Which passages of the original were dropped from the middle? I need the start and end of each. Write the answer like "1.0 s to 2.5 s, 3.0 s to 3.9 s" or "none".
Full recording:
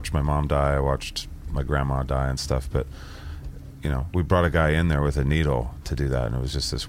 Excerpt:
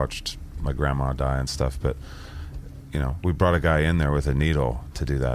none